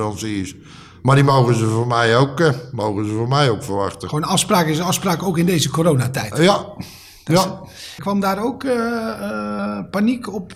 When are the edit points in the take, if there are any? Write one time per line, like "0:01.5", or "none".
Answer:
0:08.0